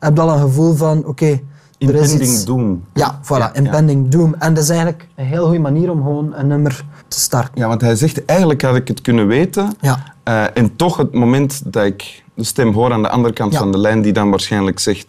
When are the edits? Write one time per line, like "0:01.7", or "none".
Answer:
0:07.0